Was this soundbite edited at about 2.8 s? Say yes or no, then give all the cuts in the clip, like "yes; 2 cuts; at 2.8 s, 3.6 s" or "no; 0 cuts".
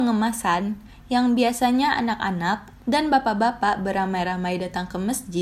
yes; 1 cut; at 2.8 s